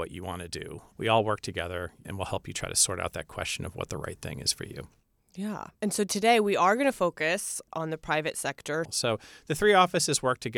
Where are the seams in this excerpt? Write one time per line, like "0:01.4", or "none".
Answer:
0:05.8
0:08.8